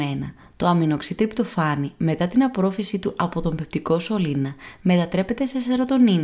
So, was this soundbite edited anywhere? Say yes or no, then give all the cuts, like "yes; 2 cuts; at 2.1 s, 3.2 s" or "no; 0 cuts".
no; 0 cuts